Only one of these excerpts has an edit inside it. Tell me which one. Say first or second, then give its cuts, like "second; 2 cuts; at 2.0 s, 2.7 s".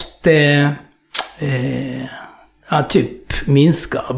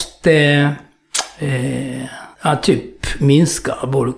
second; 1 cut; at 2.3 s